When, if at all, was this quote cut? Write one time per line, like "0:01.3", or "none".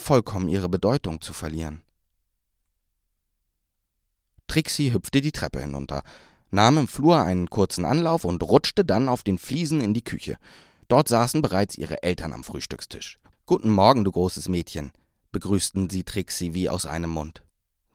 none